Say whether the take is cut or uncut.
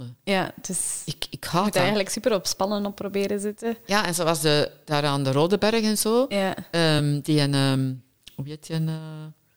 uncut